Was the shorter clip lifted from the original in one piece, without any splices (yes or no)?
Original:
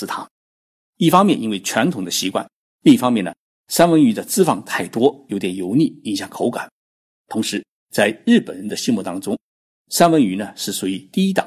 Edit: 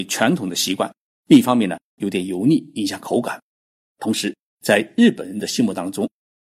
no